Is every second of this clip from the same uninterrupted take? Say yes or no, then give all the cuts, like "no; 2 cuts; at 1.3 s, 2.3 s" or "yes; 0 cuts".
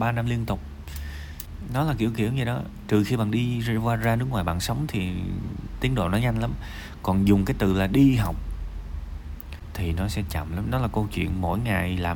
no; 1 cut; at 10.6 s